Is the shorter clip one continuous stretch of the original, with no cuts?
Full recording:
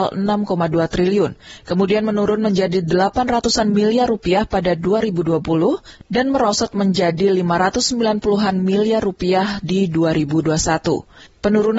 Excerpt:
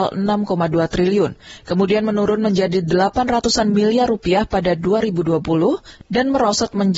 yes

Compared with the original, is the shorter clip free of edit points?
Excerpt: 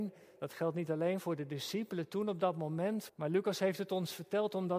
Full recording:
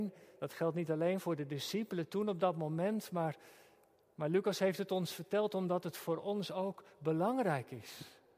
no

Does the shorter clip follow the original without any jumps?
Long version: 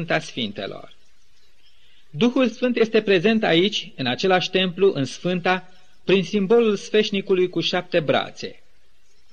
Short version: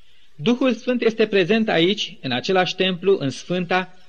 yes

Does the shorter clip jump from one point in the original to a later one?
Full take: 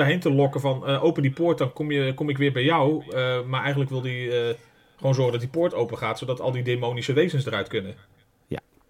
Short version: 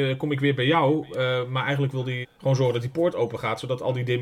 yes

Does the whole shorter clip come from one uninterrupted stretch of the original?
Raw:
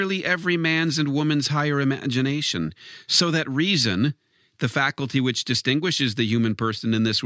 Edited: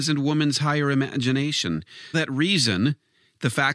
no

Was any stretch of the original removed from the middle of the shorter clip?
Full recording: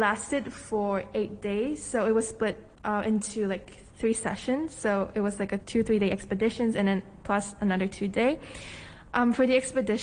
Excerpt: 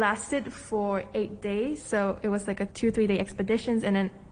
yes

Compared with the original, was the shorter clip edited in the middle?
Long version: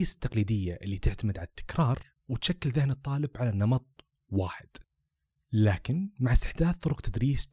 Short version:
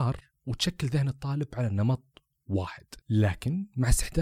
yes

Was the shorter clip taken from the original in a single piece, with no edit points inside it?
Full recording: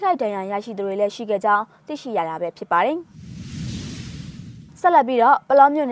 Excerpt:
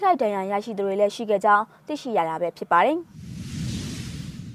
yes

